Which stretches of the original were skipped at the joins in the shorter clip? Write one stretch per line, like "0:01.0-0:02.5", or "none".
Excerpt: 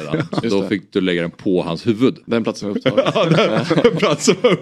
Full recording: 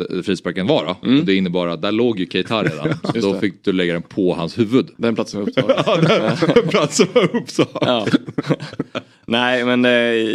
none